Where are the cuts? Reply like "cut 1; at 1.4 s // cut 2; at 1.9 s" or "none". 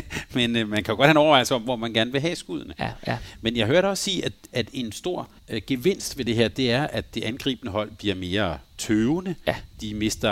cut 1; at 5.4 s